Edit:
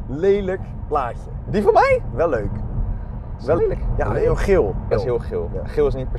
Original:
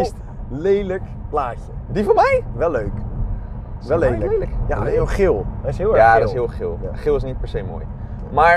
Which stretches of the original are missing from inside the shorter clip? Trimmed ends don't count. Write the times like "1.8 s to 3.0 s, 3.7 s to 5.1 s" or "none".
4.0 s to 4.3 s, 5.6 s to 6.2 s